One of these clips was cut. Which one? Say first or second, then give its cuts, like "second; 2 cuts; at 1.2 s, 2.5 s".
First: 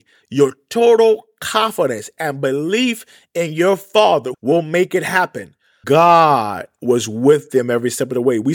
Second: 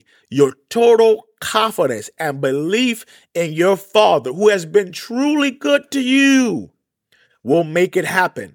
first; 2 cuts; at 4.3 s, 5.8 s